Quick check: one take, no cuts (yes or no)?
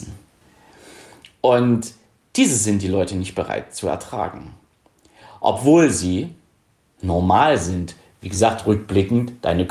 yes